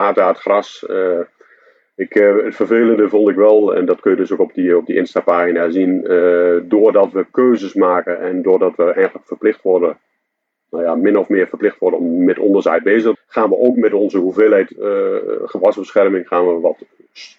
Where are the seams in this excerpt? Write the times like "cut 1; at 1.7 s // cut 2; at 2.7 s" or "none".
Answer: cut 1; at 13.1 s